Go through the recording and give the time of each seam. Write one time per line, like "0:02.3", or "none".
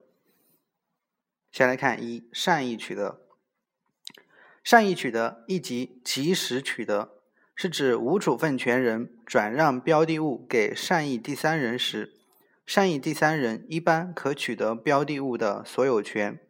0:01.5